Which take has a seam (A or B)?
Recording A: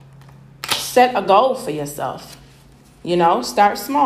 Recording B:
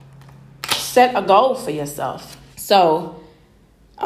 B